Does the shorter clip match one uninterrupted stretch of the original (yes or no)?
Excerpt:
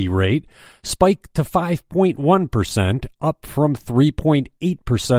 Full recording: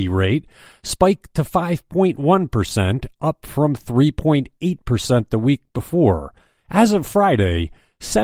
yes